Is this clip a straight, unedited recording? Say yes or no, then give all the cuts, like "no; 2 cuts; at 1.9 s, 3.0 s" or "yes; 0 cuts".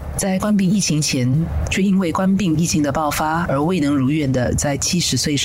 no; 2 cuts; at 1.7 s, 3.4 s